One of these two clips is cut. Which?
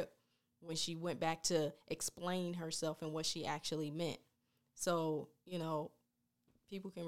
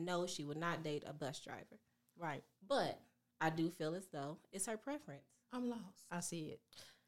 second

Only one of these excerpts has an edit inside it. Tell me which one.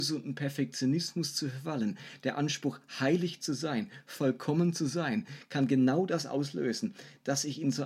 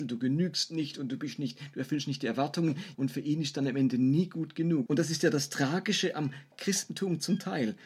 second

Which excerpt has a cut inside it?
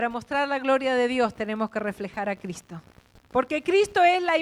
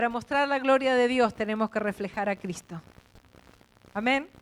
first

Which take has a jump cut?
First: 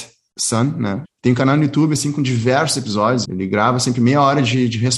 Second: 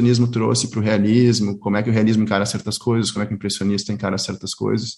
first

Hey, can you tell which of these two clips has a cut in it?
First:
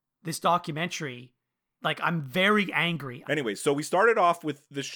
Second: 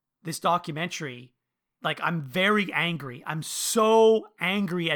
first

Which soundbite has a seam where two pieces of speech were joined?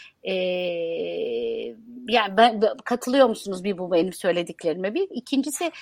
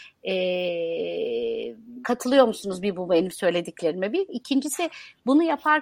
second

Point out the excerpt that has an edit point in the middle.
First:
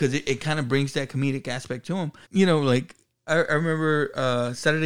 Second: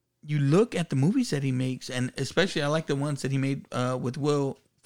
first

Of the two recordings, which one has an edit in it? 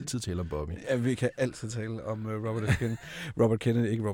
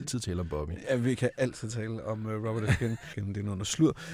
second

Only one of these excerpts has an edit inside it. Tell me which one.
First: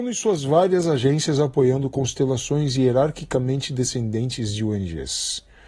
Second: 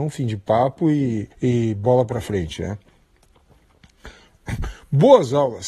second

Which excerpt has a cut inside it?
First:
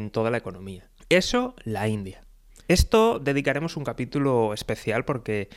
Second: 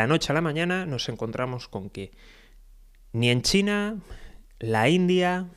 first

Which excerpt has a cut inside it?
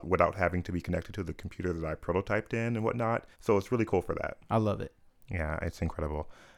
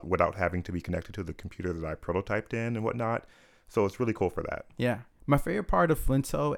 first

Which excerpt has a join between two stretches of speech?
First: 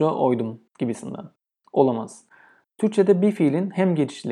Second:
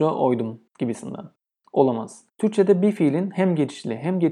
second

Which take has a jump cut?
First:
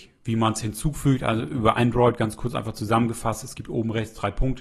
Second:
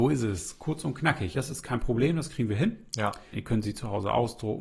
second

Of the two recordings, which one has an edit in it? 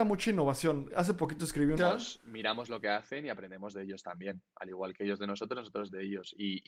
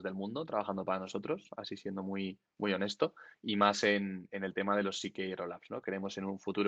first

